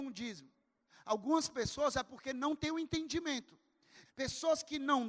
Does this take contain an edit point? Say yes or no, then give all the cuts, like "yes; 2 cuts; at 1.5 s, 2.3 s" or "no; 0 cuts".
yes; 1 cut; at 4.0 s